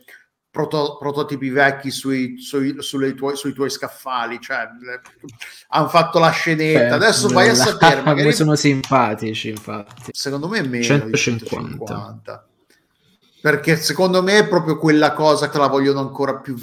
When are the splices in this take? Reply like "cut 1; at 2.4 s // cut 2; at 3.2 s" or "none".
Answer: cut 1; at 10.1 s // cut 2; at 15.5 s